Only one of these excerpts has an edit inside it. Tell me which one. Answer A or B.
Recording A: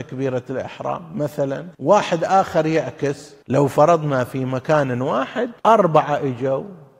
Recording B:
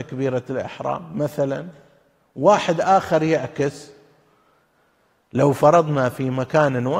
A